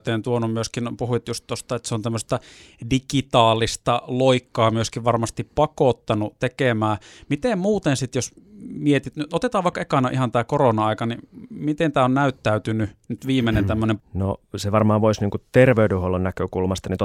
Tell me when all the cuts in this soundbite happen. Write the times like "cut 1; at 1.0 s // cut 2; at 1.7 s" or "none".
cut 1; at 14.0 s

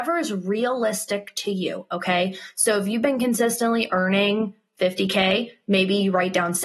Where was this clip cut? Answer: none

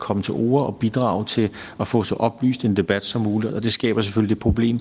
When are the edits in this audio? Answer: cut 1; at 3.5 s

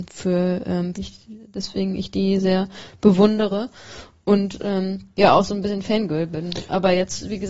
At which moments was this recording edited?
cut 1; at 0.9 s

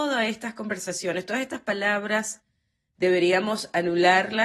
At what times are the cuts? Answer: none

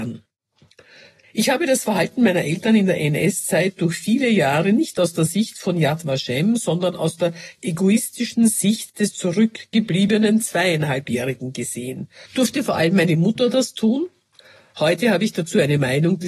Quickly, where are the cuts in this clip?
cut 1; at 1.2 s // cut 2; at 12.3 s

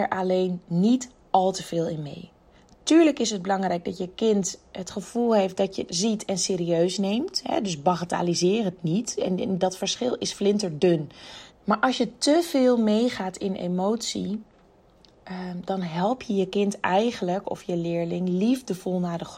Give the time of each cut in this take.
cut 1; at 5.9 s // cut 2; at 11.5 s

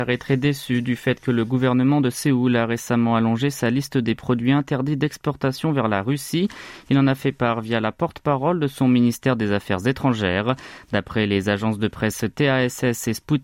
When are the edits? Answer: none

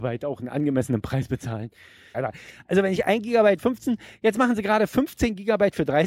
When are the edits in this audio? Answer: cut 1; at 2.1 s

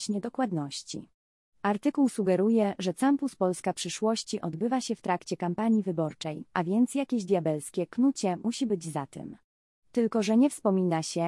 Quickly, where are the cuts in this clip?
none

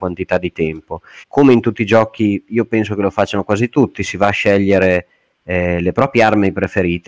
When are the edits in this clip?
cut 1; at 1.2 s

